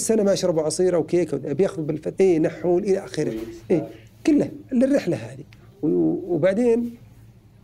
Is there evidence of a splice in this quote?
yes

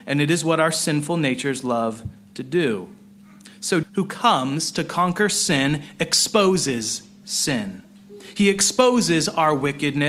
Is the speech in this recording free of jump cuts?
no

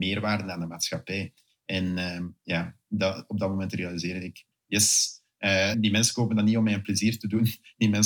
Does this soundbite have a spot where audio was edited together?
yes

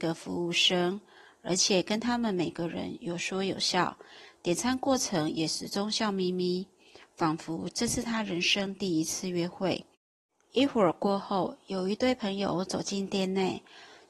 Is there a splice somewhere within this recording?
no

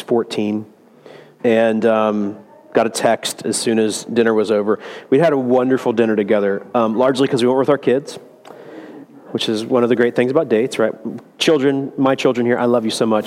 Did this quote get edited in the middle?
yes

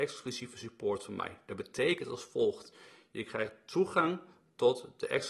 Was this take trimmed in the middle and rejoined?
no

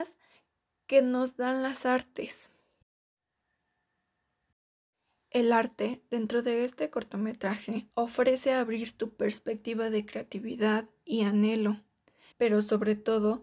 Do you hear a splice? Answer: yes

